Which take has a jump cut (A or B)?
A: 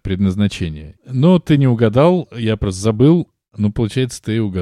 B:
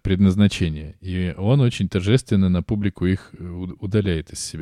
A